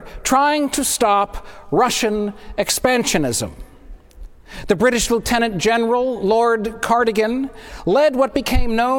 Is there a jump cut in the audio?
no; 0 cuts

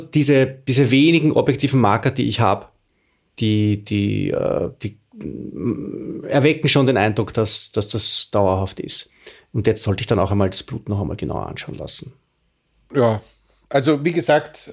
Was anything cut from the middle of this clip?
no; 0 cuts

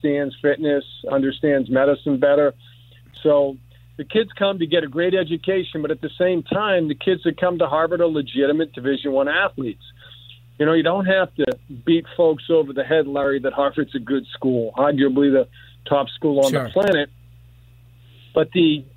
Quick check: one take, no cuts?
yes; 0 cuts

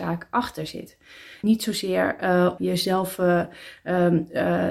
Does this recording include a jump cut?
yes; 2 cuts; at 1.4 s, 2.6 s

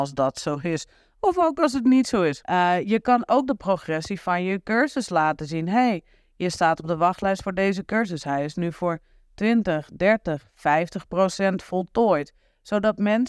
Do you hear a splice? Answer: yes; 1 cut; at 2.4 s

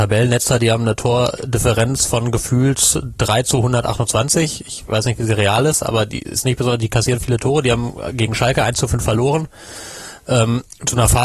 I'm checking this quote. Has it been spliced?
no; 0 cuts

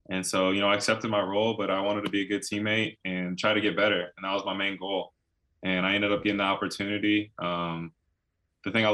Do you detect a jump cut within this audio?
no; 0 cuts

